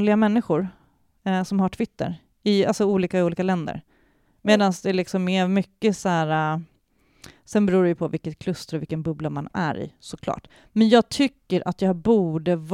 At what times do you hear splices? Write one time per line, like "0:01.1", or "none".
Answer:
none